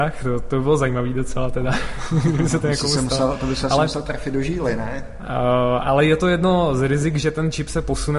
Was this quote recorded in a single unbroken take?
yes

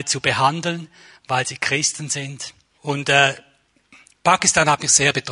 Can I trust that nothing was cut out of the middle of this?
no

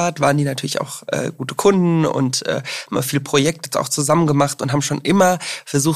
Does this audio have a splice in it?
no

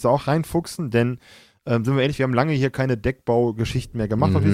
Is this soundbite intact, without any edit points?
yes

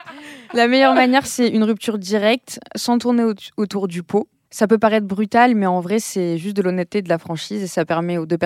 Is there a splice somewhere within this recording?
yes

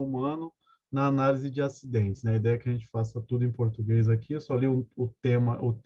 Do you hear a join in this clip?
no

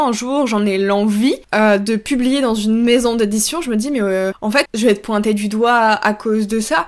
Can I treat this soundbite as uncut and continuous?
no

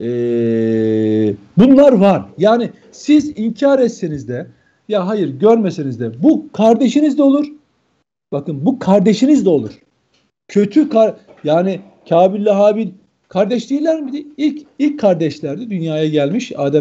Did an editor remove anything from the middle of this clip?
no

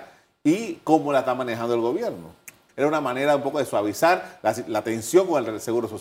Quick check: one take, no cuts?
no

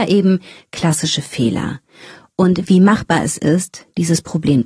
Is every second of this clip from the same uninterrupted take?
no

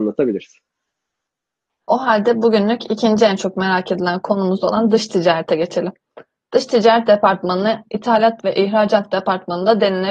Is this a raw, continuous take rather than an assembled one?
no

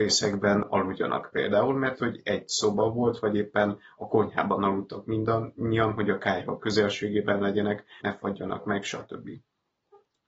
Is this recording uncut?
no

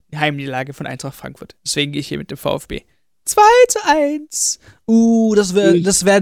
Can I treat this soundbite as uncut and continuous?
yes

